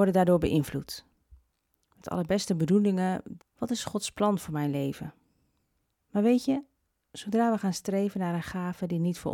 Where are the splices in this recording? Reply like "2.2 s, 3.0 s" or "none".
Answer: 3.4 s, 6.0 s